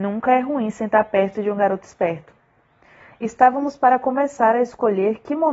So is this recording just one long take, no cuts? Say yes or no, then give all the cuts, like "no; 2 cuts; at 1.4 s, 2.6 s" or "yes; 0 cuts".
yes; 0 cuts